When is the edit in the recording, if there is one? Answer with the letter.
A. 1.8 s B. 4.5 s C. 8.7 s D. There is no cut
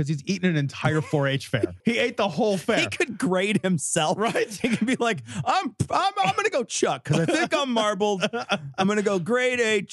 A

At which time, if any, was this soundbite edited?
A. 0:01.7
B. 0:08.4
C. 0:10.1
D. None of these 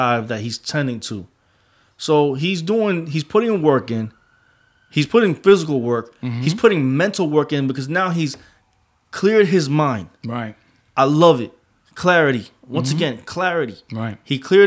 D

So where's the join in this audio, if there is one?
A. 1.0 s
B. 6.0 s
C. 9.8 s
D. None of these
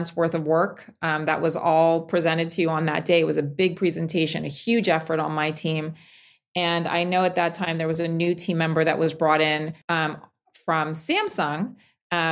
C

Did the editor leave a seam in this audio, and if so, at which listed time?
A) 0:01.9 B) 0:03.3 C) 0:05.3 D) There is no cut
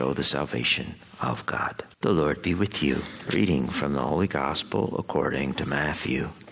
A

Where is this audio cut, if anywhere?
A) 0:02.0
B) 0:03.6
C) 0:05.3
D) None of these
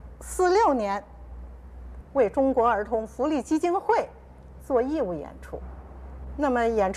A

